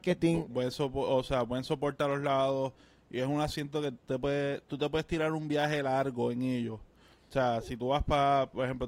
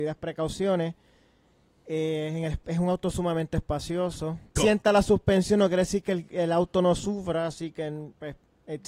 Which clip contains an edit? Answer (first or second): second